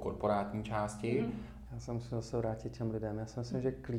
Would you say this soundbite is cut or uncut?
cut